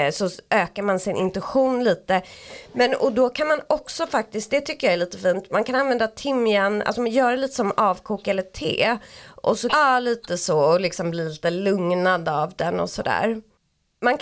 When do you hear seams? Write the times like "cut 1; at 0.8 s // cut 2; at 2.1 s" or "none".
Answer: cut 1; at 9.7 s

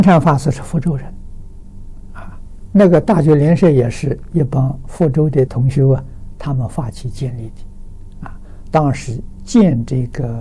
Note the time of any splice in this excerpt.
cut 1; at 5.5 s

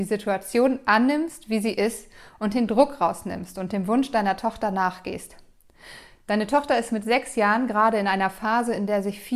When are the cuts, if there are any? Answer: none

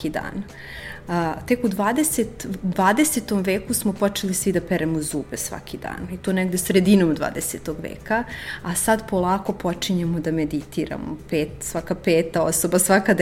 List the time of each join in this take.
none

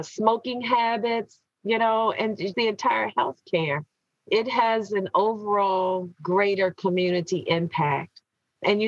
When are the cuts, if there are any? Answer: cut 1; at 2.5 s

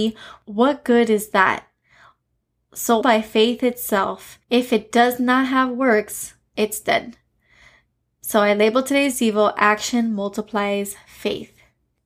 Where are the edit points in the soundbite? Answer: cut 1; at 3.0 s

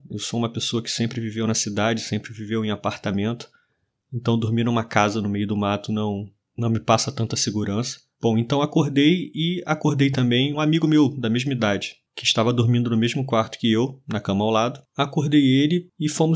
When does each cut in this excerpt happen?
cut 1; at 8.2 s // cut 2; at 10.5 s

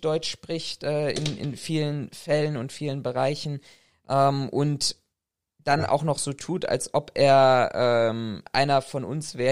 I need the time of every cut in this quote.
none

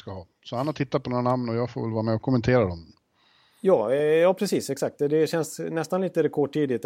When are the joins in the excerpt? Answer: none

